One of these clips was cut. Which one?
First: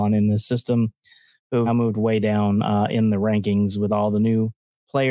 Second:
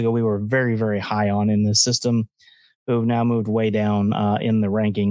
first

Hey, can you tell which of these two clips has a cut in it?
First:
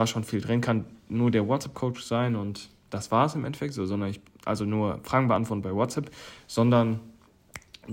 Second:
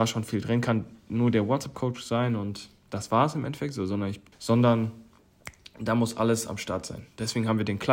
second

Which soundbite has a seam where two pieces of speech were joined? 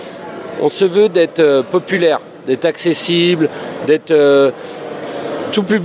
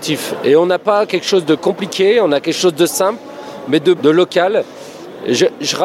second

